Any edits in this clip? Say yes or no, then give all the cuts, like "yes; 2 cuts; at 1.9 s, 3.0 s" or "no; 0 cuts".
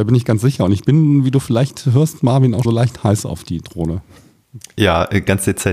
yes; 1 cut; at 2.6 s